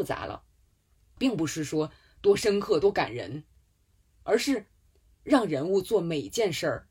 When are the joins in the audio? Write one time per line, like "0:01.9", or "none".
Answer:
none

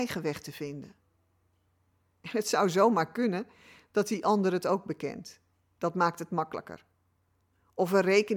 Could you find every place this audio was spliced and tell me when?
none

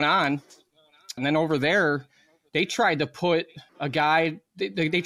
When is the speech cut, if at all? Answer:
0:01.2
0:03.7

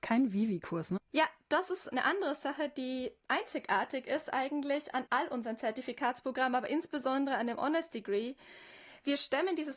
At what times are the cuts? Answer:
0:01.0

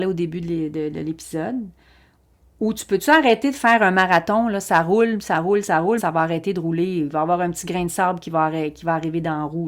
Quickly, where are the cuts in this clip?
0:06.0

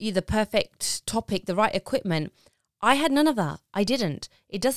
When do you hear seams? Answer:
none

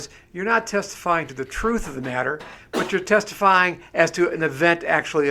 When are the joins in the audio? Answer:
none

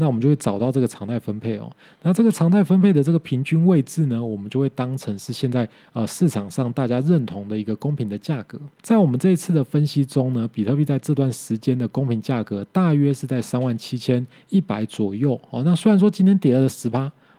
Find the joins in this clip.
0:08.8

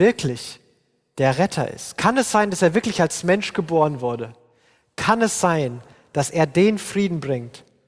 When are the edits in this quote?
none

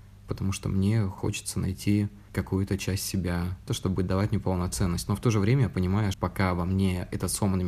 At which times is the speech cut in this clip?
0:03.7
0:06.1

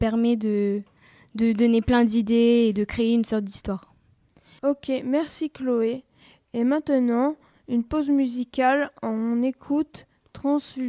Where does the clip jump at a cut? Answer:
0:04.6

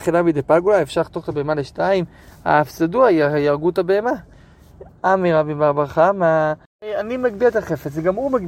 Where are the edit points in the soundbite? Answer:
0:04.9
0:06.7

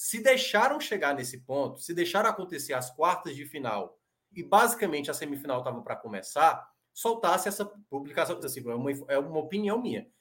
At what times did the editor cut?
0:04.3
0:08.4

